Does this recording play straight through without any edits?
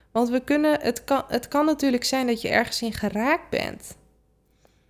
yes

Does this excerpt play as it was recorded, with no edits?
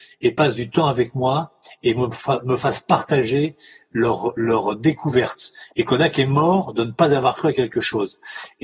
no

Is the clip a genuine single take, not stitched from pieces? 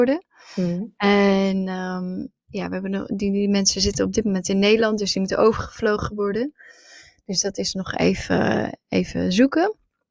yes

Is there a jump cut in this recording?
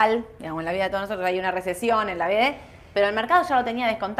no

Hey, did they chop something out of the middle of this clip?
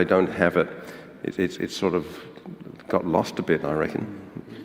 no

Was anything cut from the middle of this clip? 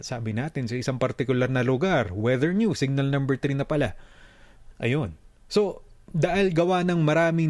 yes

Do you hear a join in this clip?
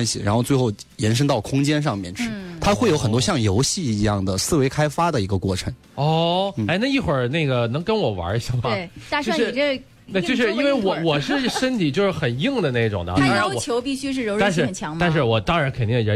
yes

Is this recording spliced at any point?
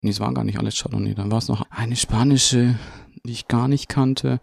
yes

